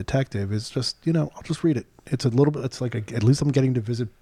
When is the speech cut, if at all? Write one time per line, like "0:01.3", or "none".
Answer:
none